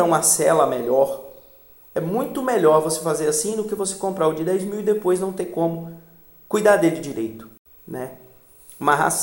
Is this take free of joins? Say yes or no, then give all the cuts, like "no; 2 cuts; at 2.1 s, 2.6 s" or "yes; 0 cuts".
yes; 0 cuts